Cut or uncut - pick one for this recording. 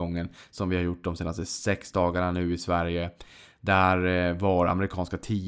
uncut